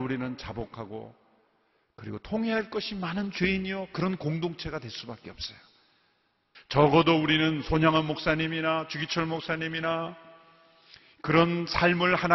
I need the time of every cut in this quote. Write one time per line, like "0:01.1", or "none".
0:06.5